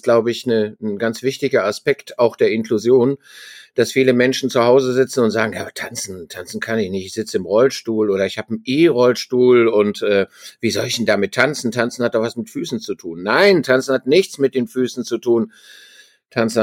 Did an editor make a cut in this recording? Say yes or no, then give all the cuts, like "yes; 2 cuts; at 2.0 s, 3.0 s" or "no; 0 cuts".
no; 0 cuts